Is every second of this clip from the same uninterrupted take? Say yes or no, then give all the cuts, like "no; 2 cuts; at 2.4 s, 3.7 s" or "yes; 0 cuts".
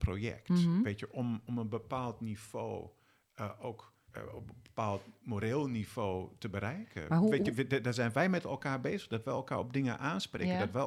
no; 1 cut; at 4.1 s